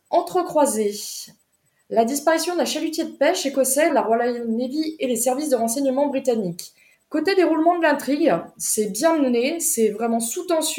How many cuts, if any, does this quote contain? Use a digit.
2